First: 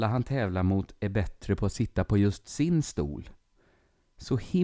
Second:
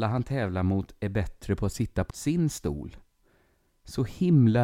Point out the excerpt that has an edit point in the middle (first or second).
second